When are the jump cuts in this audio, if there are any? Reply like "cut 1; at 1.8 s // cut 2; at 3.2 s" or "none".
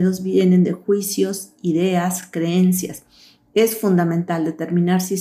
none